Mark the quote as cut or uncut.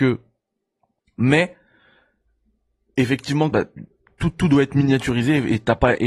cut